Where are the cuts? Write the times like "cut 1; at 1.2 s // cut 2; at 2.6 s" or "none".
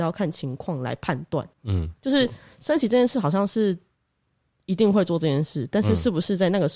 cut 1; at 1.5 s

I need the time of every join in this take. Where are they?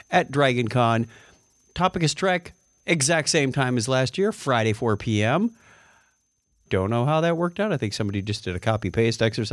cut 1; at 6.7 s

